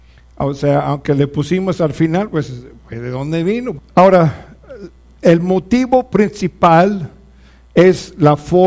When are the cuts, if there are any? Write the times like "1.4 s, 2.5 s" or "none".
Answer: 3.8 s